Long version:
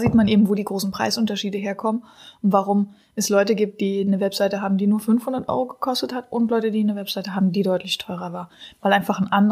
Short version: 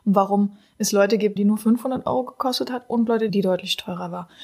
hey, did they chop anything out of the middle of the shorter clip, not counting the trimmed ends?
yes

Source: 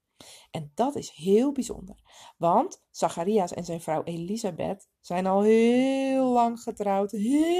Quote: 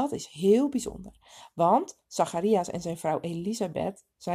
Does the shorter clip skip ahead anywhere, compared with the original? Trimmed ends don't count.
no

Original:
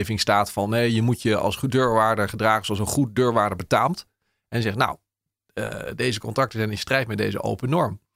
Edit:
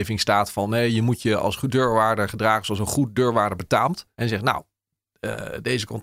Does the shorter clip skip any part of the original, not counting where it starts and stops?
yes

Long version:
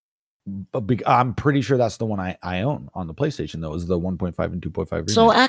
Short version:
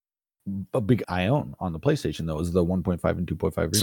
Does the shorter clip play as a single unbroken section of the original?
no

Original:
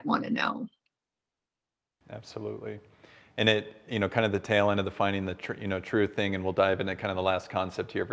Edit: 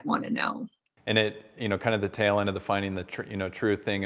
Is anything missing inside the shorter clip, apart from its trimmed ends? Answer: yes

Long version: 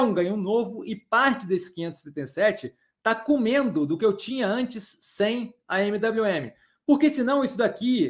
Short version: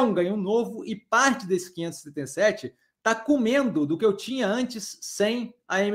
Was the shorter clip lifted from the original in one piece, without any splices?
yes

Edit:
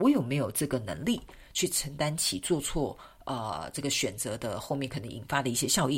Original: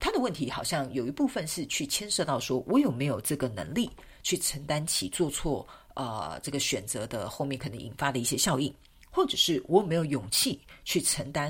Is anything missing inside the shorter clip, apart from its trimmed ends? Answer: no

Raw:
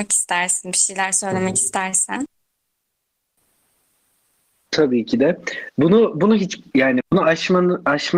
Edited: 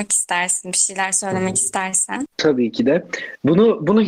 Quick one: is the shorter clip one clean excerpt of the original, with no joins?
no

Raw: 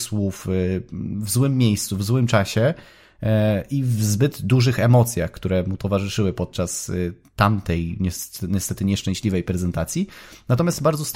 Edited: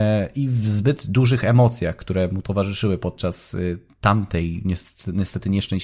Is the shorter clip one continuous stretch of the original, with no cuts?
yes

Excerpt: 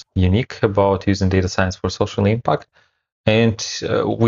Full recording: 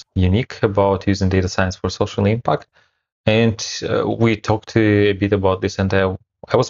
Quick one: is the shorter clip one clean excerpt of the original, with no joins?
yes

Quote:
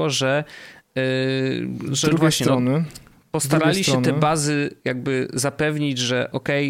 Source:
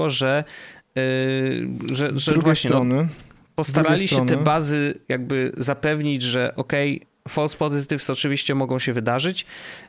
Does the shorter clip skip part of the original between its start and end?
yes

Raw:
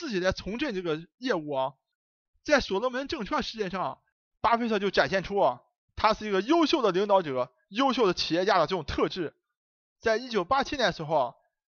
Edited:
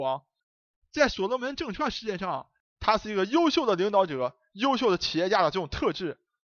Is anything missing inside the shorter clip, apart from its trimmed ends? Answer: yes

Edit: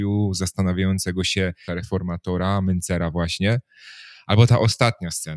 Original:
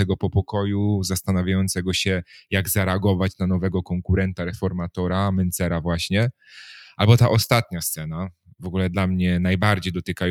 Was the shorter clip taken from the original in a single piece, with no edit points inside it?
no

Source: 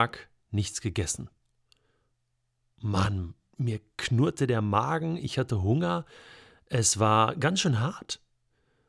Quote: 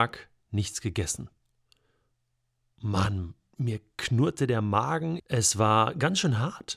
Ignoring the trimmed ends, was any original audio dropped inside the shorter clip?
yes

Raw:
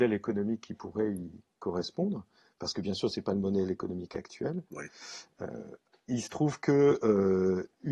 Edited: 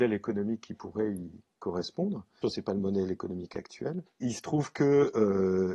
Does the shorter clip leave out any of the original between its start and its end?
yes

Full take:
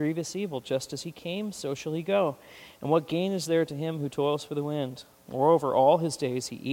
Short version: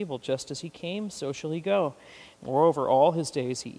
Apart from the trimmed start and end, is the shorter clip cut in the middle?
yes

